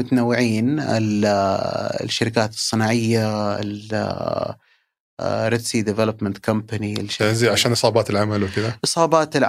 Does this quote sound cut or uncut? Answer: uncut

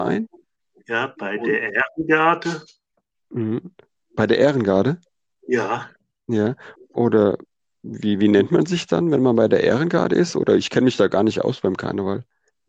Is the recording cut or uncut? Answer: cut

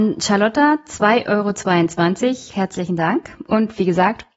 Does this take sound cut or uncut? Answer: cut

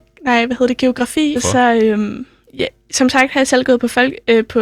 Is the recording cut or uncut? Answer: cut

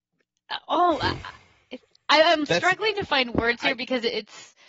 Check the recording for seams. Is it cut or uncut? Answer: uncut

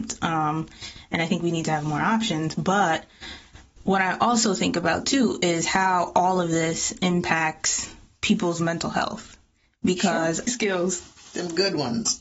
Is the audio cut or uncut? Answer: cut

